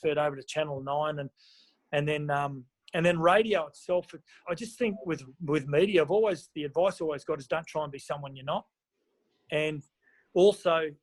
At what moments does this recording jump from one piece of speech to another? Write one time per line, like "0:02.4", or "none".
0:04.4
0:06.5